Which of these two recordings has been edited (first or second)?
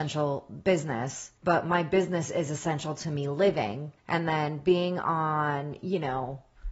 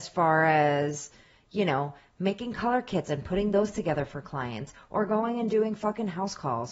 first